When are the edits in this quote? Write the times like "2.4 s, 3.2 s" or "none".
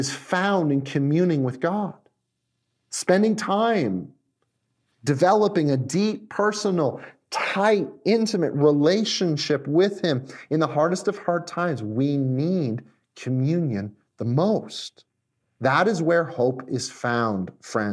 none